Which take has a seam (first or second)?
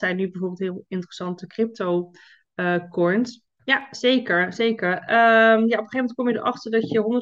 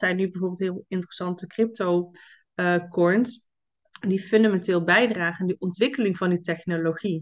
first